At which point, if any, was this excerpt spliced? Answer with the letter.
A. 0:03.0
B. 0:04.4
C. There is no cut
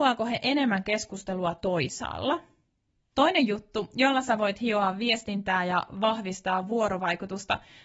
A